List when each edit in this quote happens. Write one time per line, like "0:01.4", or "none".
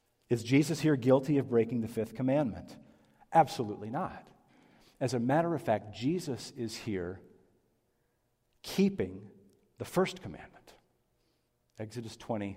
none